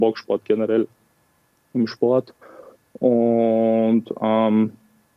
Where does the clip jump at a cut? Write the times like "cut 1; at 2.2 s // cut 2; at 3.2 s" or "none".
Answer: none